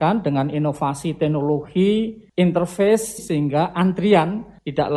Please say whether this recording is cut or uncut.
cut